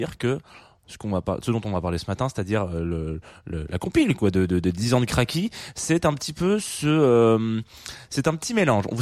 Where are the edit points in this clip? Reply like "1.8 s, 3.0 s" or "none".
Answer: none